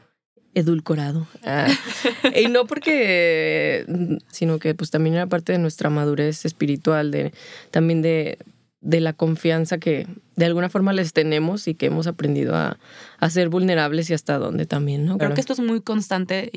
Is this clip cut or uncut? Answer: cut